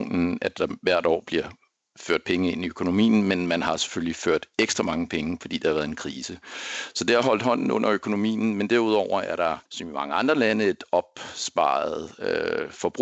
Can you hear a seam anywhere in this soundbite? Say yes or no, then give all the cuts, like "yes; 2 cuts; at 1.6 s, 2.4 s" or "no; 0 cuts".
yes; 1 cut; at 9.7 s